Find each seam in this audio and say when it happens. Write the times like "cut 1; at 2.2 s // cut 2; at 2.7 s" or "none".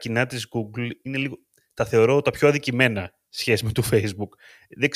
cut 1; at 3.3 s